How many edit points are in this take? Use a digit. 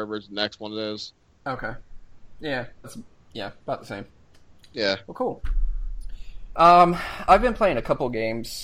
1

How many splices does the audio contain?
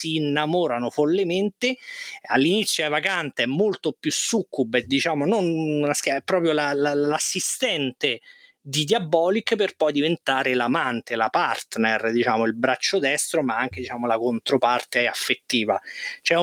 0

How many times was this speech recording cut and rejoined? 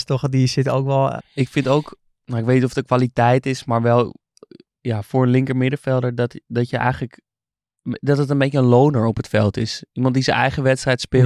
1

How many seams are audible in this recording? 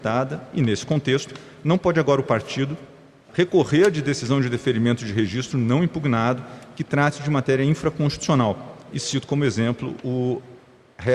2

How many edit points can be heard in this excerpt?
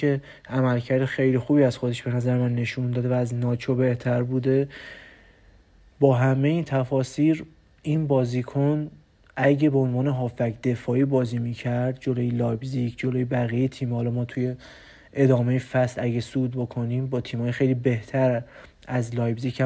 0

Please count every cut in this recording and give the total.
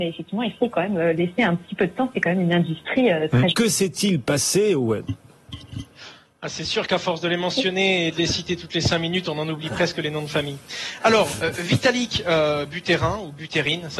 1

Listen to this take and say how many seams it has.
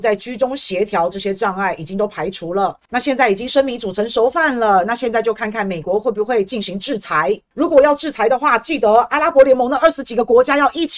1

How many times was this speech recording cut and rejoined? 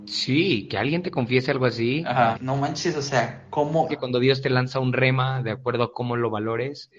2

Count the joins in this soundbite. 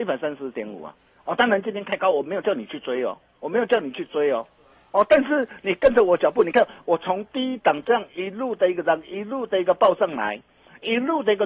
0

